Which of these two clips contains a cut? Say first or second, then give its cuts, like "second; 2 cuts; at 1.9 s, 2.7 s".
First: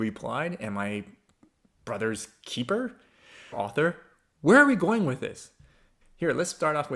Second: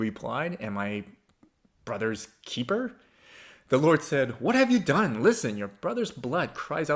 first; 2 cuts; at 3.5 s, 6.0 s